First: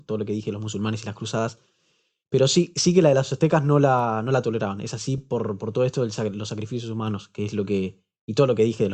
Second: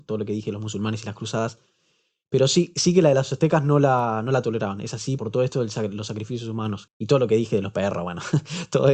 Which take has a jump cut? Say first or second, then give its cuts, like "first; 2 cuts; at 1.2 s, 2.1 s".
second; 2 cuts; at 5.2 s, 6.9 s